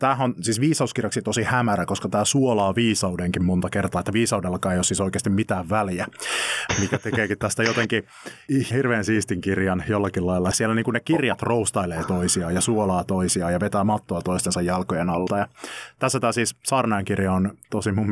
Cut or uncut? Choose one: cut